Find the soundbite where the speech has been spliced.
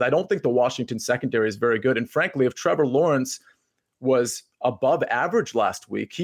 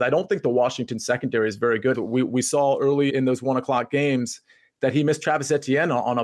second; 2 cuts; at 1.9 s, 3.1 s

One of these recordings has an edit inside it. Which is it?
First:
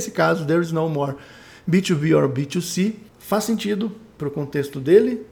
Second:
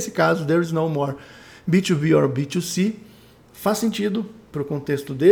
first; 1 cut; at 3.1 s

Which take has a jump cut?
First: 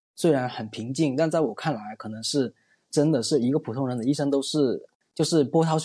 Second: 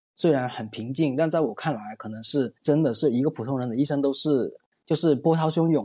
second; 1 cut; at 2.6 s

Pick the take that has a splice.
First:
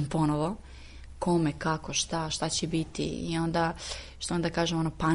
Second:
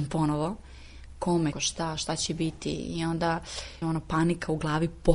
second; 2 cuts; at 1.5 s, 3.8 s

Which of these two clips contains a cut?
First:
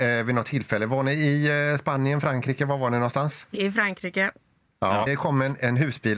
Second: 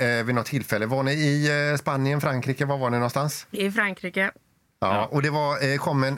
first; 1 cut; at 5.1 s

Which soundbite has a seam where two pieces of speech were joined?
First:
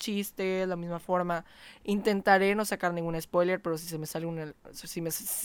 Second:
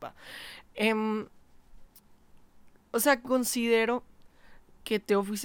first; 1 cut; at 1.8 s

